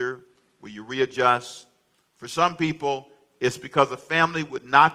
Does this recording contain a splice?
no; 0 cuts

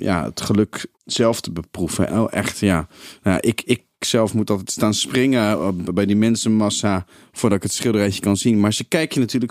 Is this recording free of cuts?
no; 2 cuts; at 0.9 s, 2.1 s

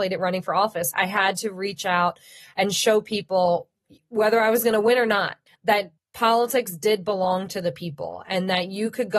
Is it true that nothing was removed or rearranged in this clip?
no; 1 cut; at 0.9 s

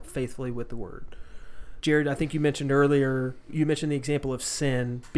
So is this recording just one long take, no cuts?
no; 2 cuts; at 1.8 s, 3.5 s

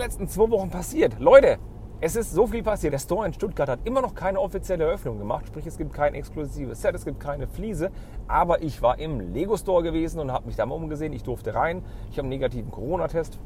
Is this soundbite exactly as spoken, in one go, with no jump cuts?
no; 1 cut; at 2.9 s

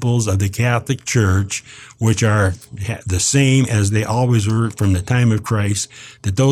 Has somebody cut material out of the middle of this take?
no; 0 cuts

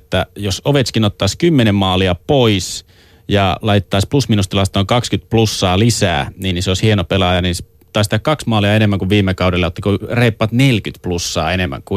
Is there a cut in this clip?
no; 0 cuts

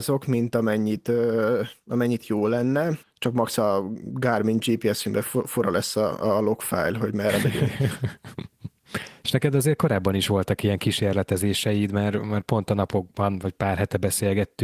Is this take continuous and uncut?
no; 2 cuts; at 3.0 s, 9.2 s

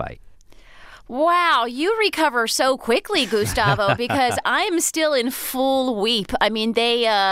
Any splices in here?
no; 0 cuts

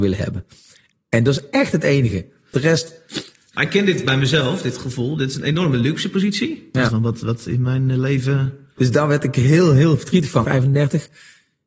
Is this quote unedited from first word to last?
no; 3 cuts; at 6.9 s, 8.8 s, 10.4 s

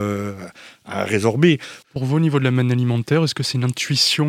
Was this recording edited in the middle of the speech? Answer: yes; 1 cut; at 1.8 s

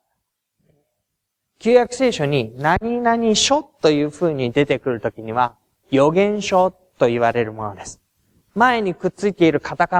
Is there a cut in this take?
yes; 1 cut; at 5.8 s

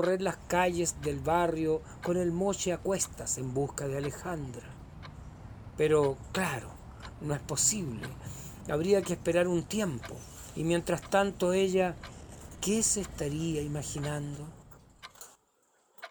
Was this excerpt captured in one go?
yes; 0 cuts

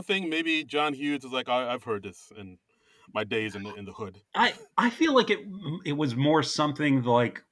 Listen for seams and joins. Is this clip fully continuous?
yes; 0 cuts

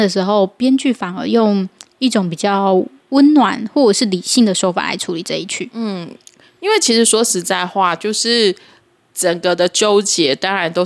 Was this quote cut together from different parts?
no; 0 cuts

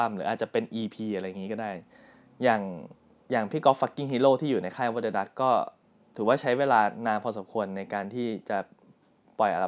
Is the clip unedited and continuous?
yes; 0 cuts

